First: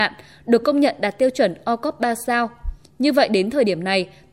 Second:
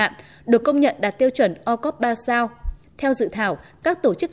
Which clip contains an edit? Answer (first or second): second